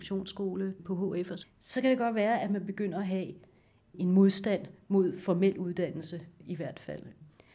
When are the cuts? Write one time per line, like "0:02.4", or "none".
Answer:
0:01.4